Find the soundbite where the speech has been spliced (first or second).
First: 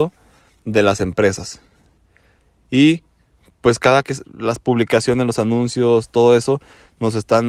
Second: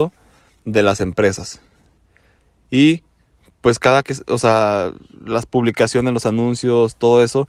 first